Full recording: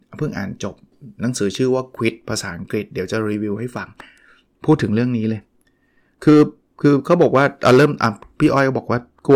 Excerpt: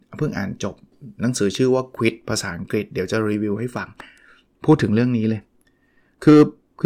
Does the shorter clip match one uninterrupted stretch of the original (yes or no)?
yes